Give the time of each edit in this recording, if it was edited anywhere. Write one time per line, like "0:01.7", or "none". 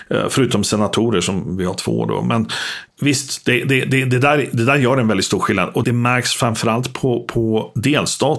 0:05.8